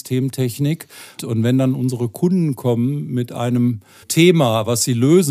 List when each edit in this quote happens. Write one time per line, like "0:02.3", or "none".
0:01.2
0:04.0